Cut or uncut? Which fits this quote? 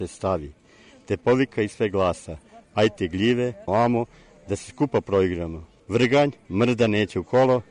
cut